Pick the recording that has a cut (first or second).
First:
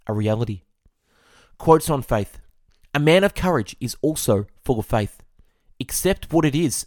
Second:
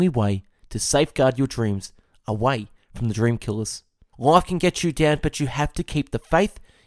second